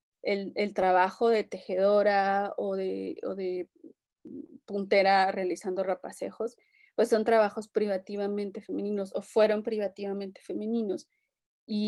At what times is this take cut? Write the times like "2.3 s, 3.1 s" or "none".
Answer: none